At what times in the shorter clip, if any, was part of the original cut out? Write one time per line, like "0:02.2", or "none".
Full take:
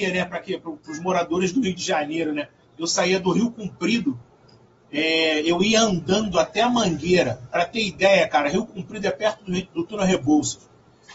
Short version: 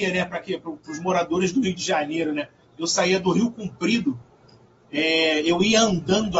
none